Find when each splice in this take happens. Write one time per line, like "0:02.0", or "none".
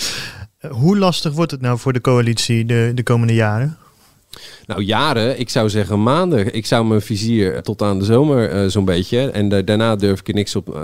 0:07.6